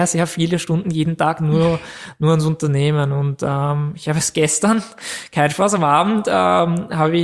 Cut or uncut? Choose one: uncut